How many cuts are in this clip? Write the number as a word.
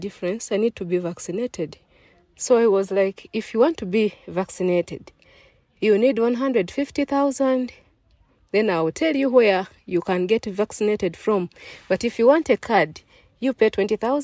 zero